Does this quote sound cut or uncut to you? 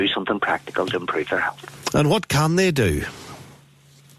uncut